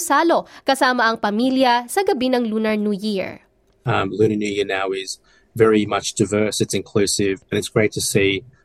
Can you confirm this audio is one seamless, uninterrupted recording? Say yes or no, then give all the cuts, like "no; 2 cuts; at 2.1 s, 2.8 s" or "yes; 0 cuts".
no; 1 cut; at 7.4 s